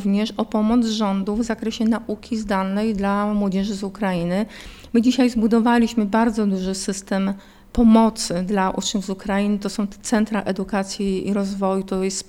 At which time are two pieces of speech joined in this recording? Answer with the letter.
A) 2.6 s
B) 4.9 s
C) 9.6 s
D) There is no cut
D